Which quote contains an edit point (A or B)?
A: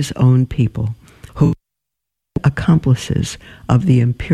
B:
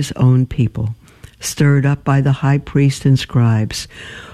A